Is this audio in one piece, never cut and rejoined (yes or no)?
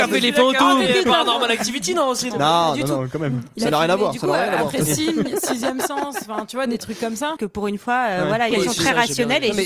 no